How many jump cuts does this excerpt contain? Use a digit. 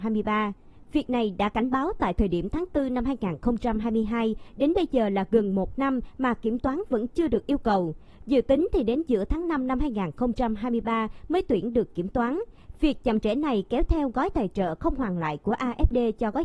0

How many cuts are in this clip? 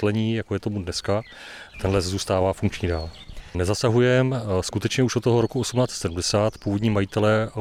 2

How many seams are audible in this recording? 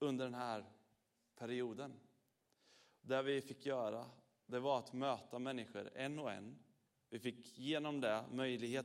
0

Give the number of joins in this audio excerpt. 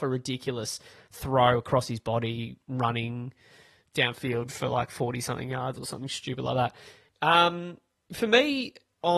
1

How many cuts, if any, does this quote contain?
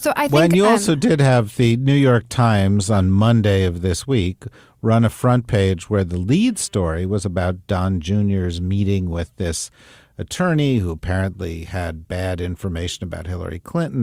0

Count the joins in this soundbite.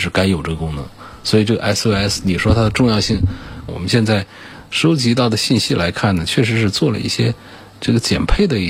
1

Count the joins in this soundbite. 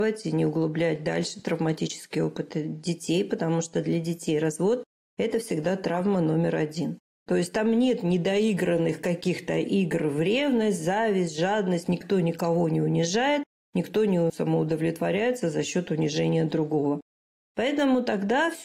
1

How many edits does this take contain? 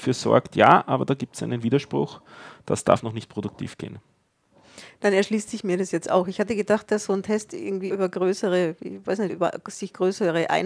2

